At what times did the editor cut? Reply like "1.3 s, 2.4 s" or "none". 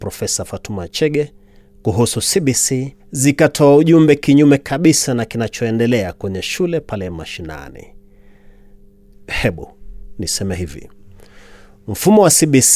3.0 s, 9.1 s